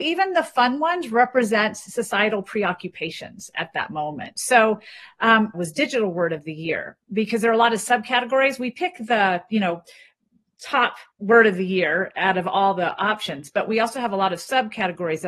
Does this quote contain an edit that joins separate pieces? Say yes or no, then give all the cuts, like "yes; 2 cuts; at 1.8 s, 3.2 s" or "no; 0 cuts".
yes; 2 cuts; at 5.5 s, 11.1 s